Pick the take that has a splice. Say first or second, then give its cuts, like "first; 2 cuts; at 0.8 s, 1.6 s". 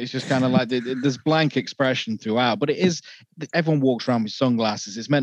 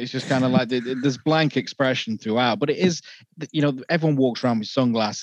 first; 1 cut; at 3.5 s